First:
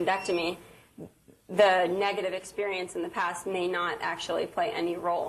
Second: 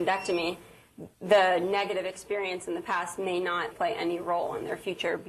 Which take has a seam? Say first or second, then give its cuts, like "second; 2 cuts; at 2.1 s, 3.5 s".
second; 2 cuts; at 1.1 s, 3.7 s